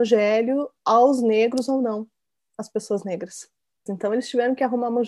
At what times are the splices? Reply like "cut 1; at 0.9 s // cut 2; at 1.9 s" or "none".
cut 1; at 3.9 s